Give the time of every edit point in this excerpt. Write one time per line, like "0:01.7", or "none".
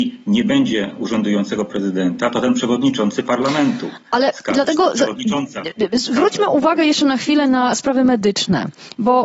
none